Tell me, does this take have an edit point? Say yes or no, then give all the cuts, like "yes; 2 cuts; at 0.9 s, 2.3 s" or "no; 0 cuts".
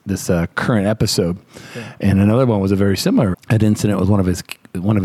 yes; 1 cut; at 3.3 s